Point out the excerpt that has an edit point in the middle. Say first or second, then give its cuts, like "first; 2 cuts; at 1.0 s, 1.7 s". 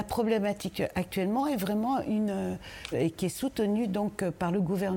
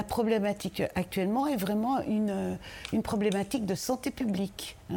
first; 1 cut; at 2.9 s